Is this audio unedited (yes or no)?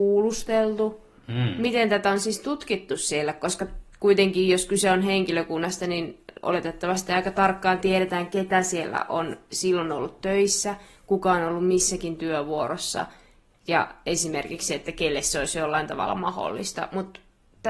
yes